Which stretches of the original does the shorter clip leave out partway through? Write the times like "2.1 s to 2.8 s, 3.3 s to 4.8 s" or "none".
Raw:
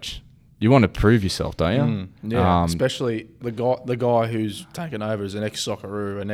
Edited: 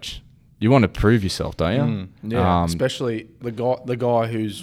none